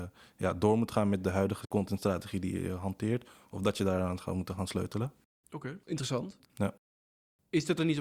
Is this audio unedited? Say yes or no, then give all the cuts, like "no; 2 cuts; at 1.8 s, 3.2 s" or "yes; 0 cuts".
no; 1 cut; at 6.4 s